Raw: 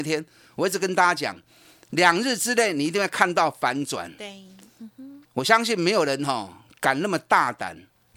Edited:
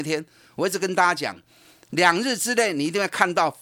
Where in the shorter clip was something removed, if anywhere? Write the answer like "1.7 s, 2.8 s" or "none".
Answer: none

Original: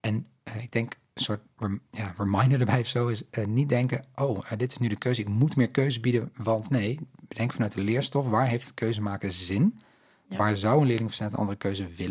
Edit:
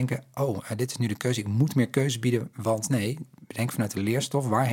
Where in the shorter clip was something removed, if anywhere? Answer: none

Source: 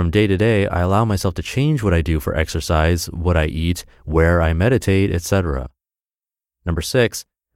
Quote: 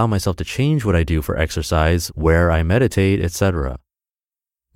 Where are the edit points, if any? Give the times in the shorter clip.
2.1 s

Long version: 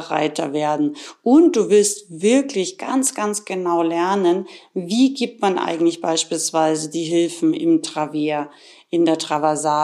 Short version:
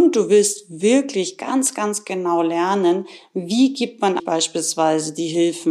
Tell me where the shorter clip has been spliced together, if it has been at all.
4.2 s

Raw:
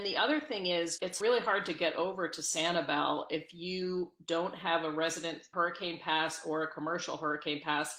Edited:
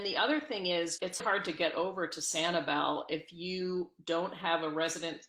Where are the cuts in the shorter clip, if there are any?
1.2 s

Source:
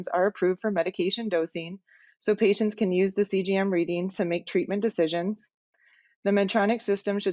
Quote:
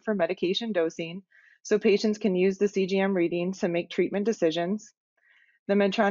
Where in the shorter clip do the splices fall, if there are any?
none

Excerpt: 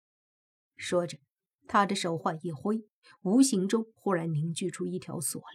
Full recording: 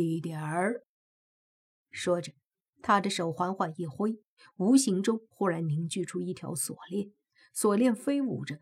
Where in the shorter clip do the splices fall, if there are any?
2.2 s

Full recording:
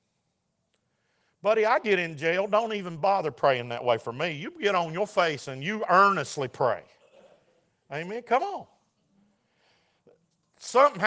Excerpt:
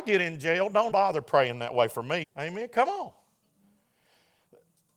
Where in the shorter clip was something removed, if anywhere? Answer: 0.9 s, 2.2 s

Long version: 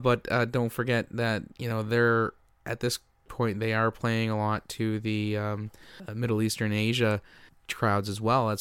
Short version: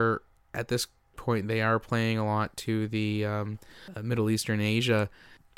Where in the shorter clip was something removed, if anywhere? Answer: none

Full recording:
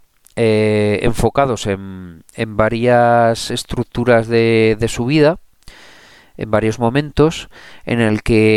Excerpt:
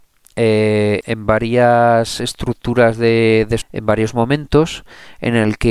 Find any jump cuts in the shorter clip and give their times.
1.0 s, 3.6 s

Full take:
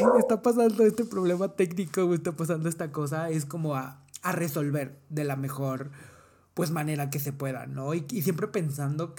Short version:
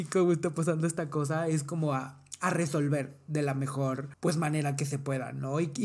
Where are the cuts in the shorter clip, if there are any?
4.1 s

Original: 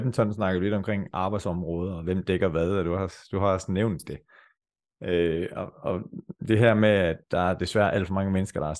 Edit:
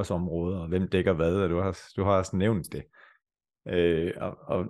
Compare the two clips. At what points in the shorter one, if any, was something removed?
none

